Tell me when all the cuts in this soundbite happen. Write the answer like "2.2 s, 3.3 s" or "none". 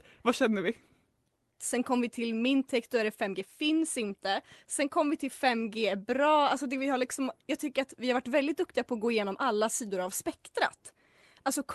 1.6 s